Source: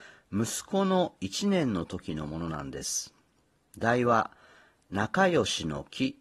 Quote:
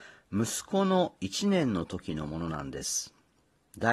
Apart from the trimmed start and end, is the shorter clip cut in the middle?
no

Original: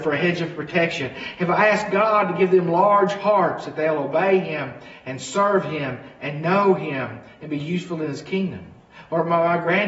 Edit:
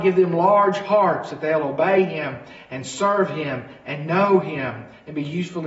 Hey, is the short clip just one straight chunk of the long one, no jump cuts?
yes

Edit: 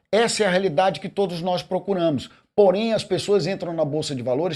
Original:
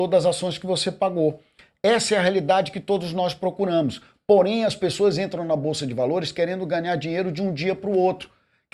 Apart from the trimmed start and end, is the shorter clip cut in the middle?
no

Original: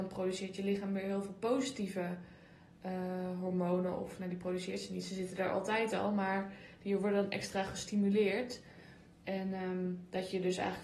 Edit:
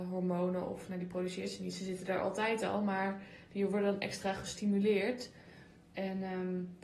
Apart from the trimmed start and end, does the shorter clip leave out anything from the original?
no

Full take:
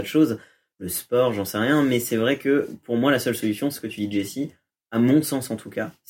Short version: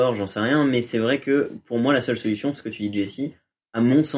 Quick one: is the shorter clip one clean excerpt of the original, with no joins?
yes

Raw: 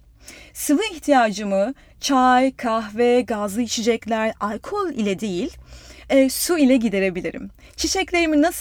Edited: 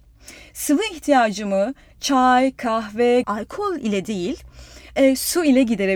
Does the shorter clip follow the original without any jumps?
no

